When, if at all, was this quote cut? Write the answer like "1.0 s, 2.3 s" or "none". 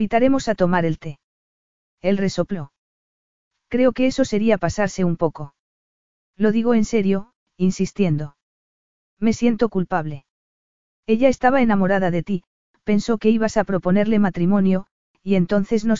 7.4 s